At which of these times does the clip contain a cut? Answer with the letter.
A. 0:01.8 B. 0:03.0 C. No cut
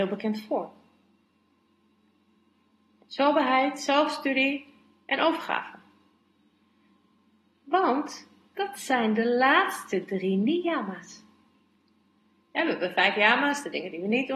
C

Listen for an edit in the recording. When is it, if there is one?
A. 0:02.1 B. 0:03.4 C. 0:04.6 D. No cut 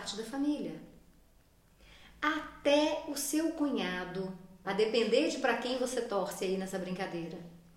C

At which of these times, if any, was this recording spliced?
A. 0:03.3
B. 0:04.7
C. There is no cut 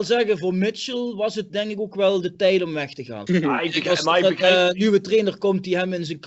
A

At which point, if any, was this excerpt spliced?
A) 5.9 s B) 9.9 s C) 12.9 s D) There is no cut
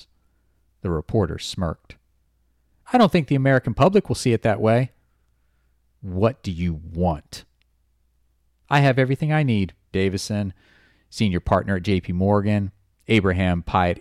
B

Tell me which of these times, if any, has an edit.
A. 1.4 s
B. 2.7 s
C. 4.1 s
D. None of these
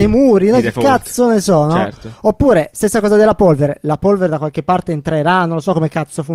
D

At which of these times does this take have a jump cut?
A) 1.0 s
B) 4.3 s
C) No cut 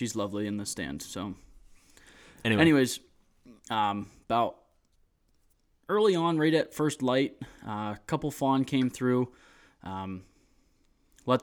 C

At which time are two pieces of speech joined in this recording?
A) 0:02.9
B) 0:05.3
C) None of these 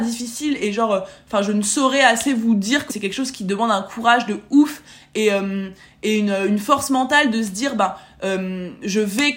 A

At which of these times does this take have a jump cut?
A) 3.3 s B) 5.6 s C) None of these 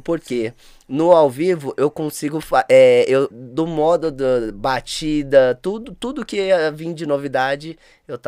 A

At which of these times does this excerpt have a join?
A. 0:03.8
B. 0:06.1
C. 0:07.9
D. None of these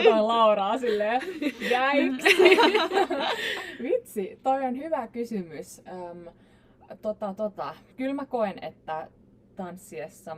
C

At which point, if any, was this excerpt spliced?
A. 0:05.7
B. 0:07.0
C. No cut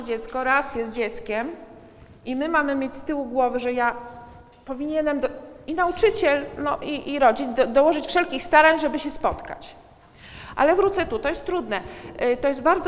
C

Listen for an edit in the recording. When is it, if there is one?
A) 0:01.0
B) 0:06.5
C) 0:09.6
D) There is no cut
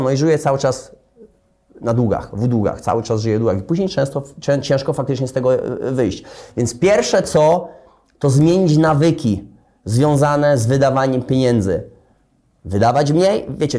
D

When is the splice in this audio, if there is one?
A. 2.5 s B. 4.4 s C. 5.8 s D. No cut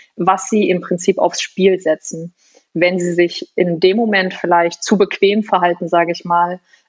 D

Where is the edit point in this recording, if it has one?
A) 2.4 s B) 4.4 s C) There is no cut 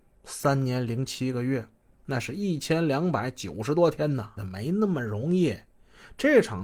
B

